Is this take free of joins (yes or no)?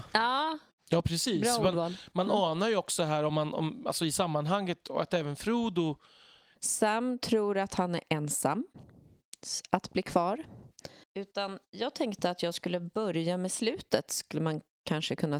no